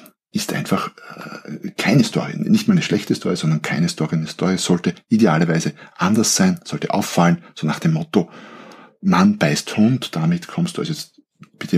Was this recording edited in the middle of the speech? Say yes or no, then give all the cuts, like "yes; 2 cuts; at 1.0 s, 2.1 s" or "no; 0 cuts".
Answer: no; 0 cuts